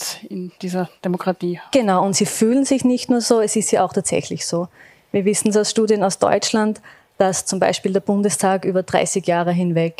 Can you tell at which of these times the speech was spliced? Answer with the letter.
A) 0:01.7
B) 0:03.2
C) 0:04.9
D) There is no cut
D